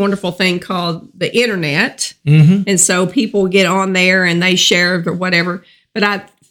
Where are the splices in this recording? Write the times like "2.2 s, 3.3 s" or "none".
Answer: none